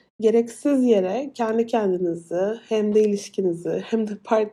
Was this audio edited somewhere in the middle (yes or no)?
no